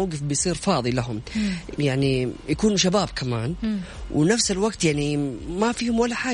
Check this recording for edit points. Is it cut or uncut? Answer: cut